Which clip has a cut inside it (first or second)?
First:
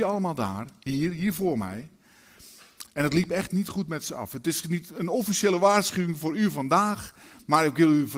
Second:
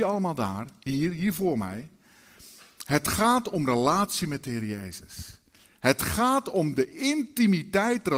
first